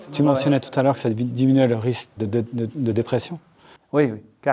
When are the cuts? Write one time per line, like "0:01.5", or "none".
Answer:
0:02.2

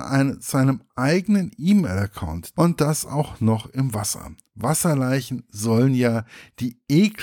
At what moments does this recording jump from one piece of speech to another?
0:02.5

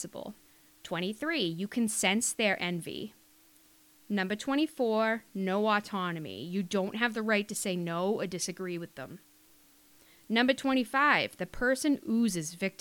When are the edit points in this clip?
none

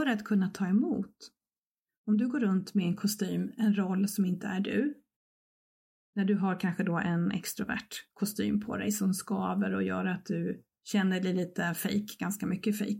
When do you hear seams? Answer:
none

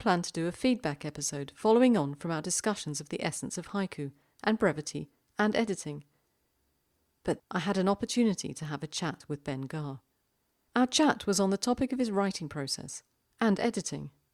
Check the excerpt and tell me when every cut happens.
0:07.4
0:10.7

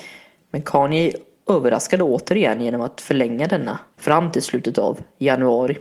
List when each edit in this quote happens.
0:03.9

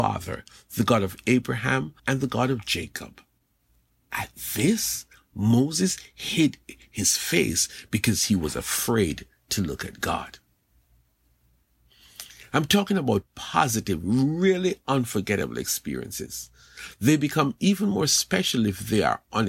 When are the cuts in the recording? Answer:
0:02.0
0:12.5

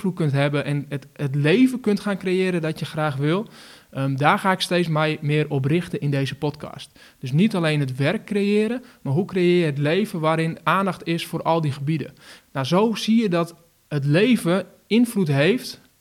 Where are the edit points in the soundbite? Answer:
0:12.4

